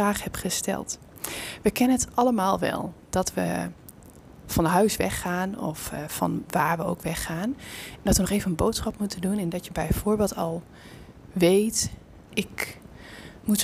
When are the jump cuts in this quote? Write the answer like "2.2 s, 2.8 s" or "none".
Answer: 12.3 s

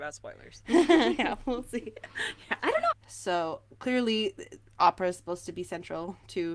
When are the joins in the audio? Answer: 2.9 s

